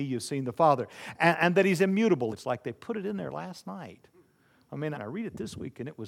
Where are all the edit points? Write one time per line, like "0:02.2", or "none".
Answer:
0:02.3
0:05.0